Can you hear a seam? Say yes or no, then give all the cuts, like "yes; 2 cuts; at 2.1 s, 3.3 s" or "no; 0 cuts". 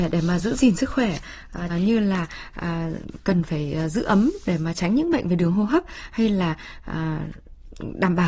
yes; 1 cut; at 1.7 s